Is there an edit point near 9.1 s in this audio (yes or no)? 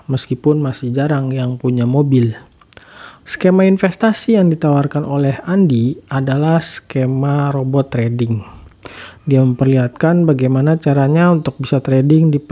no